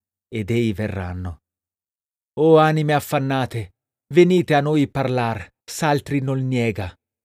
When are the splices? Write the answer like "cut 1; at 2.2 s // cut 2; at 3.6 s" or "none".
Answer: cut 1; at 2.3 s // cut 2; at 5.6 s